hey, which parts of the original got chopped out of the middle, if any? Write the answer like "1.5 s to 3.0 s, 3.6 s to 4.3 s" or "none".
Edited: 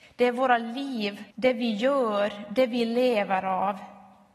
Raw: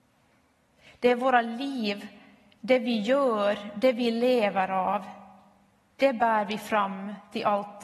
2.1 s to 2.6 s